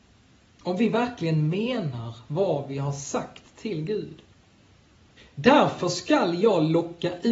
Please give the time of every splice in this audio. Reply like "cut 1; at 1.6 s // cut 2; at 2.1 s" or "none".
cut 1; at 5.2 s